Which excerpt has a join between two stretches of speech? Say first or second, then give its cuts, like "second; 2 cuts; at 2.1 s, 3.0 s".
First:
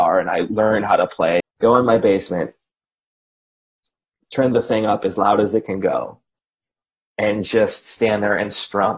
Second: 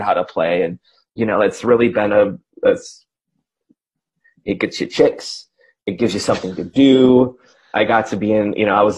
first; 1 cut; at 1.4 s